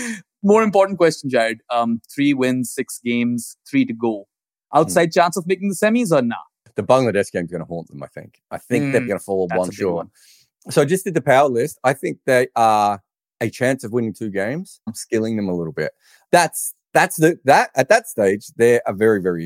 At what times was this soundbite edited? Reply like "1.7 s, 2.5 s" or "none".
9.1 s, 14.9 s, 16.2 s